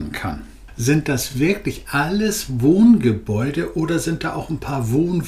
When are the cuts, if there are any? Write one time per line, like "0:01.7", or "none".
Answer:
none